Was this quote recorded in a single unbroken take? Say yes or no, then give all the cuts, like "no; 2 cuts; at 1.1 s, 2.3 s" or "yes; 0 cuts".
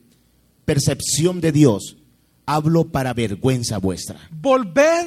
yes; 0 cuts